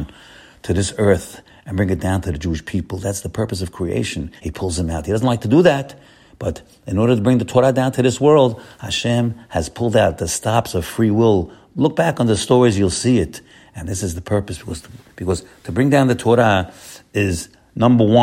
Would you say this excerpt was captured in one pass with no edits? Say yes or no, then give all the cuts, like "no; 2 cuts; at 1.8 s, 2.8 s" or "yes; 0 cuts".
no; 1 cut; at 4.4 s